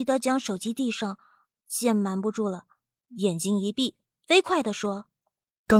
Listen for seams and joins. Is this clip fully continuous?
yes; 0 cuts

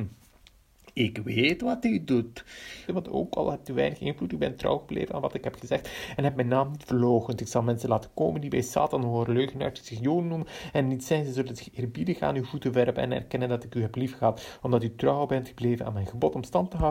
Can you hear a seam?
yes; 1 cut; at 2.9 s

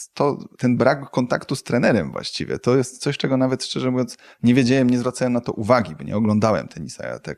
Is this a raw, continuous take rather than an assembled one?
yes; 0 cuts

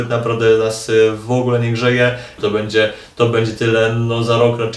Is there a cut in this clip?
yes; 1 cut; at 2.4 s

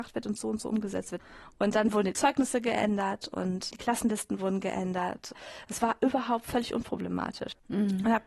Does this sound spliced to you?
no; 0 cuts

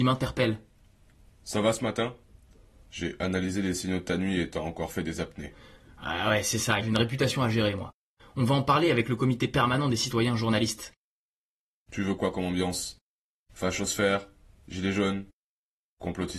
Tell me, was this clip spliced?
yes; 2 cuts; at 6.8 s, 8.2 s

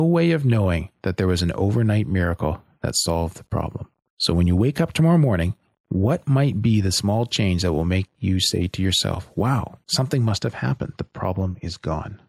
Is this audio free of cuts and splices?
yes; 0 cuts

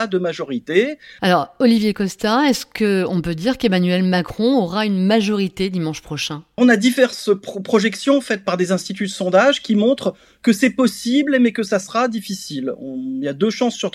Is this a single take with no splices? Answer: no; 2 cuts; at 1.2 s, 6.6 s

